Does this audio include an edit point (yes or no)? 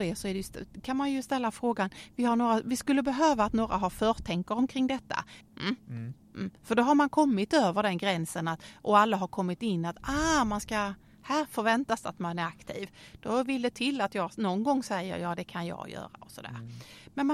yes